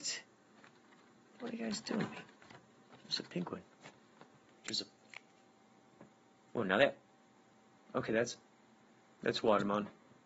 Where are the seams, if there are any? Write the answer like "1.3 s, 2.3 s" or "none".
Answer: 4.5 s